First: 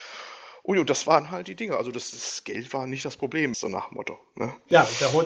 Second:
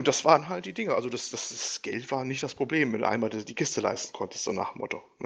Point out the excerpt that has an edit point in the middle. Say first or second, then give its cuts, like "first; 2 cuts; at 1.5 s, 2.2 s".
first; 2 cuts; at 2.1 s, 3.5 s